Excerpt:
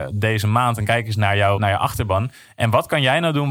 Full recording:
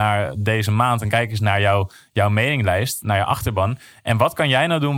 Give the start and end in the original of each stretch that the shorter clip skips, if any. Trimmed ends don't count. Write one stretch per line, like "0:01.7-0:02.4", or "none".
0:01.8-0:03.0